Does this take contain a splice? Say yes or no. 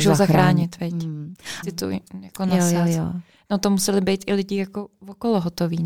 yes